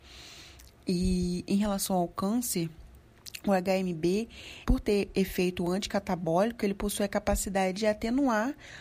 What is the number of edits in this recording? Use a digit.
1